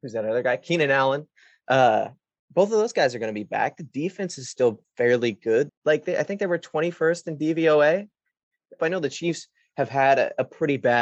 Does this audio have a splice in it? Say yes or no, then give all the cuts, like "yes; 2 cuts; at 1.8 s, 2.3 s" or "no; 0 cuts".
yes; 2 cuts; at 5.7 s, 8.8 s